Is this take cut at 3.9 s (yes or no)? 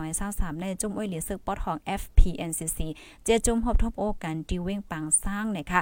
yes